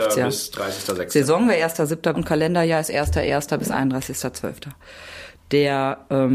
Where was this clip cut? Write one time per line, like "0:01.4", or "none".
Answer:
0:02.1